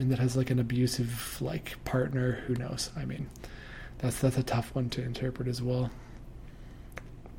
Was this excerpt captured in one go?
yes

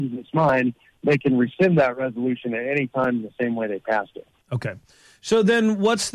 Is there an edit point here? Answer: yes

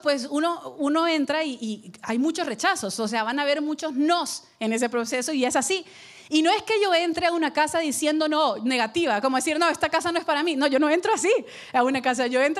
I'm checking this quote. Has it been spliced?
no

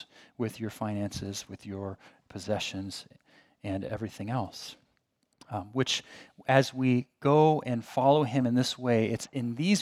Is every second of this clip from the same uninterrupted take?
yes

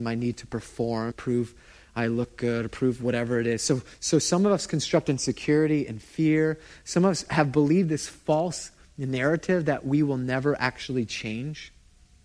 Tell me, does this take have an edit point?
yes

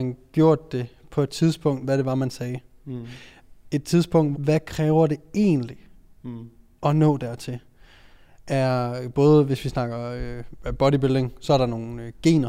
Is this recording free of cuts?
no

